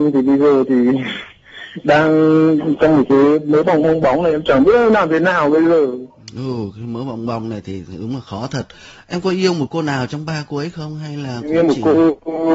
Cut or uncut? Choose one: cut